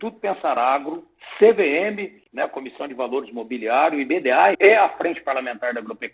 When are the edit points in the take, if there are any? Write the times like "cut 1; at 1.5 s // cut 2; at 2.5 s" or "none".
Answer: cut 1; at 4.5 s